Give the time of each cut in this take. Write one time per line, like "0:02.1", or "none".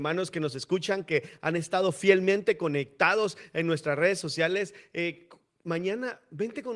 none